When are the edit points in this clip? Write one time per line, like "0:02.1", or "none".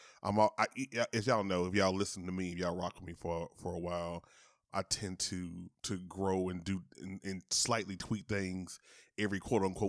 0:04.7